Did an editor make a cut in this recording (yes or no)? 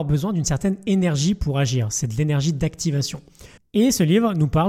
yes